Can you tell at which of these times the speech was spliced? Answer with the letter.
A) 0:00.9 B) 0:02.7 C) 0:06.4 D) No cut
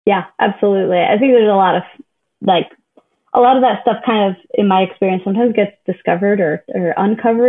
D